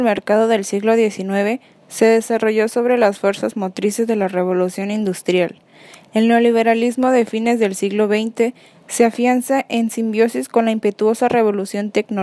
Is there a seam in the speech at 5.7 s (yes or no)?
no